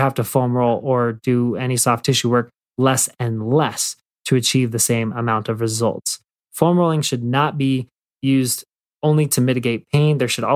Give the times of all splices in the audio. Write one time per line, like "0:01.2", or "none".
0:06.4